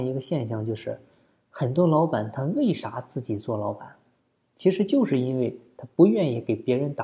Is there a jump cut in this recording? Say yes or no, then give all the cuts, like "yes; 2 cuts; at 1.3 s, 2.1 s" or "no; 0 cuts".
no; 0 cuts